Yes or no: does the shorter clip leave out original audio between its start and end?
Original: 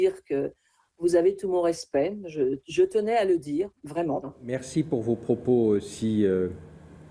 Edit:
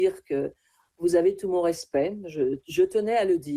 no